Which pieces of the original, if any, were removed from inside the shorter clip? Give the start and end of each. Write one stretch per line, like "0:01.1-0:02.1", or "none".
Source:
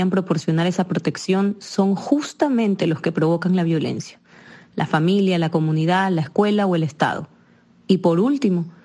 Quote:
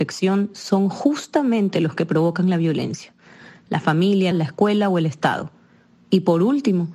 0:05.4-0:06.1